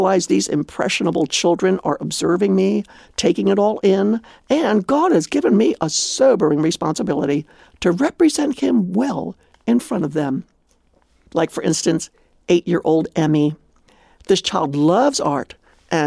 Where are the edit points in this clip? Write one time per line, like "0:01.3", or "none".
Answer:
none

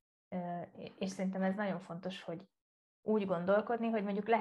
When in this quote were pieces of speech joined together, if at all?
none

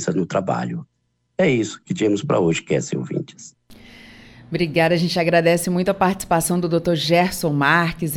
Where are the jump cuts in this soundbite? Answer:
none

